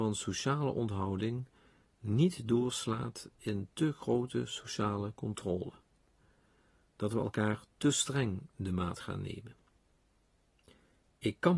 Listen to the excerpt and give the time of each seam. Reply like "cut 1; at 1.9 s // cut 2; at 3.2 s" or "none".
none